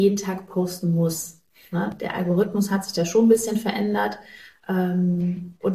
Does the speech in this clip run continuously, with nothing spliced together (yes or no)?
yes